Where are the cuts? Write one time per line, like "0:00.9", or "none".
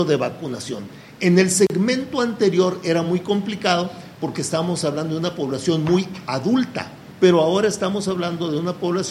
none

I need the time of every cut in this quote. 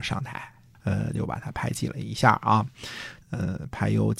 0:01.1
0:03.2

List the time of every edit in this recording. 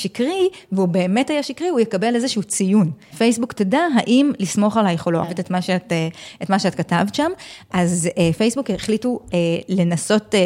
0:03.1
0:05.2

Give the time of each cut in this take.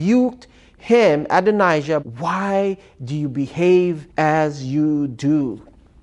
0:02.0
0:04.1

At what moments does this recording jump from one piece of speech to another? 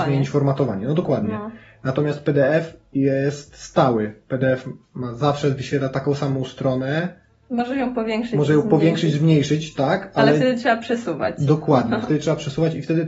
none

